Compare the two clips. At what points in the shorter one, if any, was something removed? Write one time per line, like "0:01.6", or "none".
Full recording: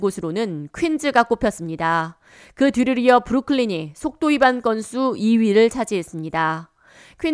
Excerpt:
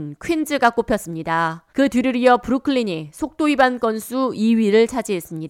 0:01.7